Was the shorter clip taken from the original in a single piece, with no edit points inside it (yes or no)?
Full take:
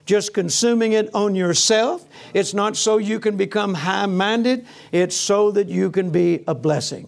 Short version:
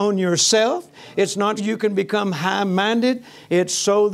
no